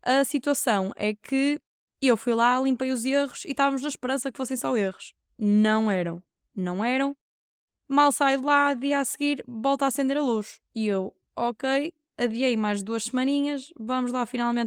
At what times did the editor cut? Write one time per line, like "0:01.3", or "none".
none